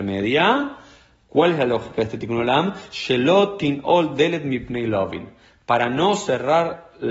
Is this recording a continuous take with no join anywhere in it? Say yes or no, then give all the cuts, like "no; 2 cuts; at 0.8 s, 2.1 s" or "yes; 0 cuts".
yes; 0 cuts